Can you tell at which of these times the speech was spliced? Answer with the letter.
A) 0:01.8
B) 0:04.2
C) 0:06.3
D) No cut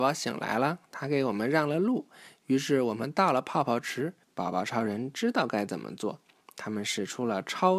B